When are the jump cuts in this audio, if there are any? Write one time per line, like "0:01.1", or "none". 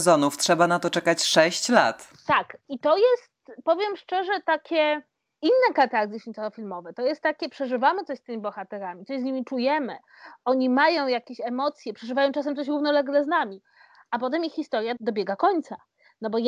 none

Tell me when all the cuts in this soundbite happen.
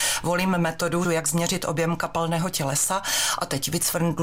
0:01.0

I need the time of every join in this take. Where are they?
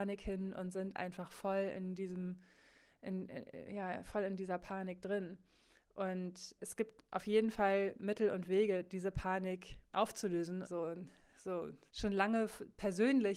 0:06.6
0:10.6
0:11.9

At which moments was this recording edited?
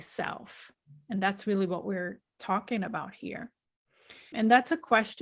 0:04.3

